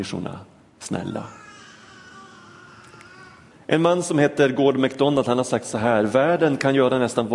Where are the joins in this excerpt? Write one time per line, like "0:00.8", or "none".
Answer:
0:03.5